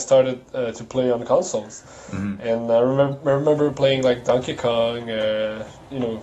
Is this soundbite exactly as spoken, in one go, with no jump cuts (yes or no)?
yes